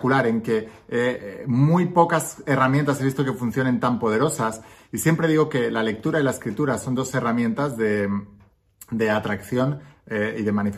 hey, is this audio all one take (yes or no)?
yes